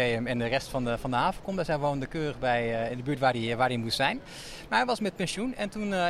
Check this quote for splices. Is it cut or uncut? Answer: uncut